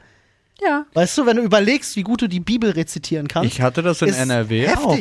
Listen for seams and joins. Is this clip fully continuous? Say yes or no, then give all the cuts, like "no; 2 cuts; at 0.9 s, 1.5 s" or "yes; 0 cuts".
no; 1 cut; at 1.9 s